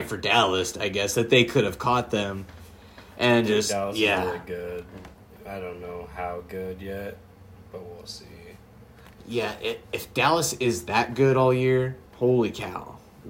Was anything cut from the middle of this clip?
yes; 1 cut; at 12.1 s

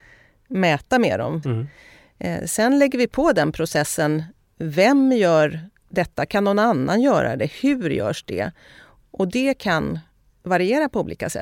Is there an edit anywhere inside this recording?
yes; 2 cuts; at 1.4 s, 5.8 s

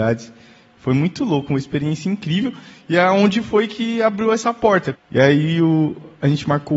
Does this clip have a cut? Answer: yes; 1 cut; at 4.9 s

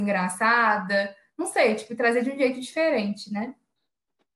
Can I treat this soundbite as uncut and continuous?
yes; 0 cuts

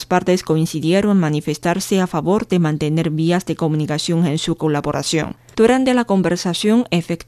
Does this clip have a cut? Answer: yes; 1 cut; at 5.5 s

